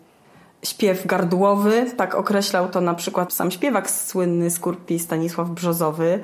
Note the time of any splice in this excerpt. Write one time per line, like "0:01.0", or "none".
0:03.3